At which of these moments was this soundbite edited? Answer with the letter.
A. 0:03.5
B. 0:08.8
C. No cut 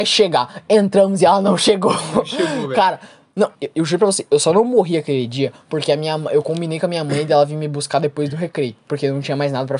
A